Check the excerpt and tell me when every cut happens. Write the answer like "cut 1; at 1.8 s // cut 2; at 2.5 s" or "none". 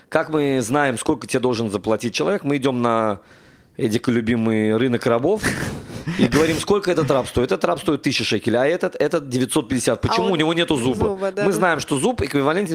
none